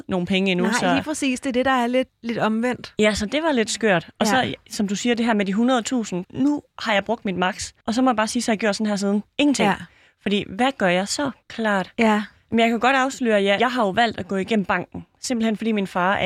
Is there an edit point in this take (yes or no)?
yes